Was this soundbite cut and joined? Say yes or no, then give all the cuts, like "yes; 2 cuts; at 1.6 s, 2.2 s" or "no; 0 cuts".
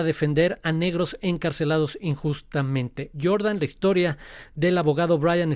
yes; 1 cut; at 3.1 s